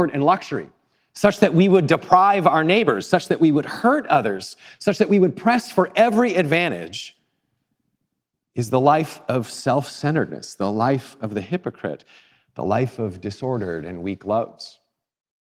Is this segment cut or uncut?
uncut